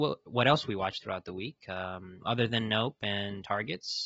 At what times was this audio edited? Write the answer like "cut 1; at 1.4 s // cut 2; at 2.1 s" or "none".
cut 1; at 2.2 s